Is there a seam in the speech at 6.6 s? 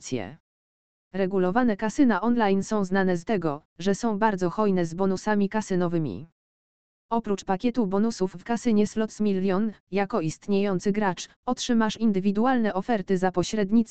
no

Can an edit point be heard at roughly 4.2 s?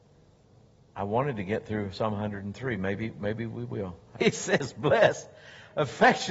yes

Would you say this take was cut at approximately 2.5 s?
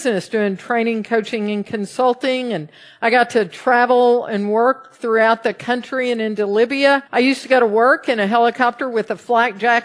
no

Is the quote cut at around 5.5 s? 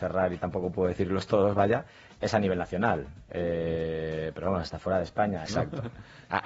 yes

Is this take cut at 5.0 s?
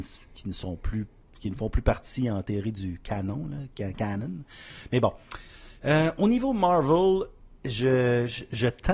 no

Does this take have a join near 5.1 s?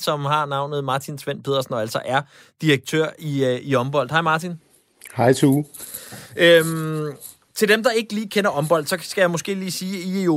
no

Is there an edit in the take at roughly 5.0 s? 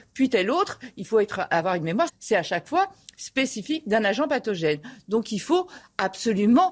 no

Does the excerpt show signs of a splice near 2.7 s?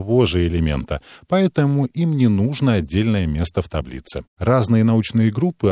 no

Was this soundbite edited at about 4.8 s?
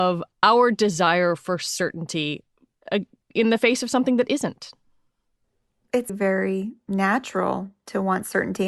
no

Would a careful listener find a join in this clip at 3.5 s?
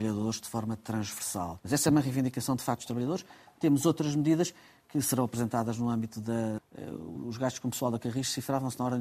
no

